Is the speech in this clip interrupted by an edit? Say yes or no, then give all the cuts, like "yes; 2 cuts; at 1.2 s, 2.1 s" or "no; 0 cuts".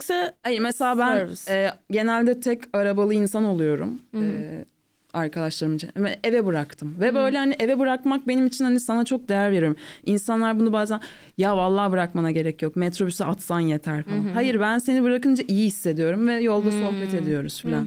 no; 0 cuts